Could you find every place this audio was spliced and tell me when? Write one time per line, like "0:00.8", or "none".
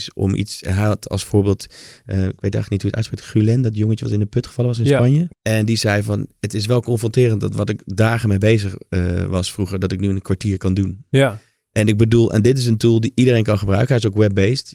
0:05.3